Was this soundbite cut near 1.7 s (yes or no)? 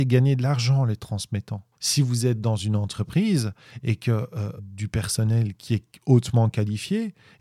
yes